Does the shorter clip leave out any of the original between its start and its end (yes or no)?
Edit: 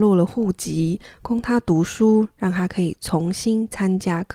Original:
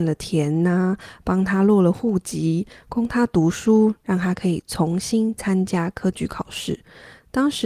no